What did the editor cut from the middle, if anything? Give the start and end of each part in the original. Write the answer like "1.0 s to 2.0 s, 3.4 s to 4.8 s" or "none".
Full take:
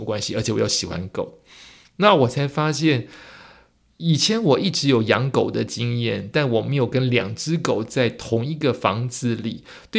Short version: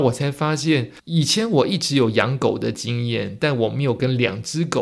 3.2 s to 3.9 s